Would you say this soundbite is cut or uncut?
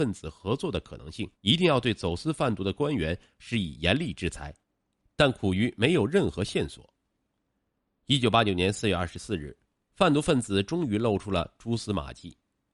cut